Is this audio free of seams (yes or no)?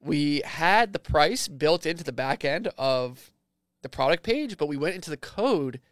yes